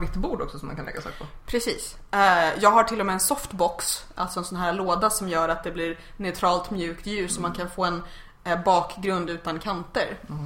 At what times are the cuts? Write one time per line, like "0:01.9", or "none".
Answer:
none